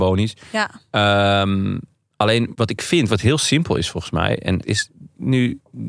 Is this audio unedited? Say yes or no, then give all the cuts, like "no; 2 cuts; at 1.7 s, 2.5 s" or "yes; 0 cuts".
no; 2 cuts; at 2.5 s, 4.6 s